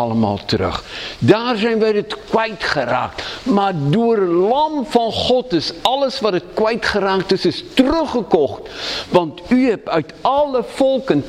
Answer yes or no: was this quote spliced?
no